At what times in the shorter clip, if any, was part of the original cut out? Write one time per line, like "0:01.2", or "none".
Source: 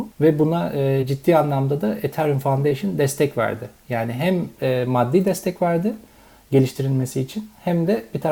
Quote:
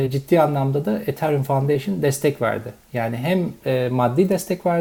none